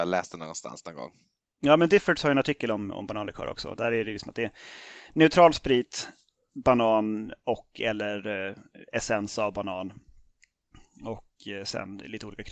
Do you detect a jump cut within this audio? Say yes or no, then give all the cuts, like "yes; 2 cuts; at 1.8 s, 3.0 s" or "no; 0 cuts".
no; 0 cuts